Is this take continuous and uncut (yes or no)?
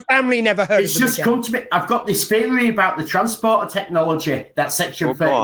yes